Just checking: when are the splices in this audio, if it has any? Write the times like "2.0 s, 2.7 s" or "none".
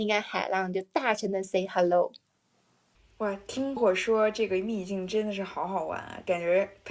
3.8 s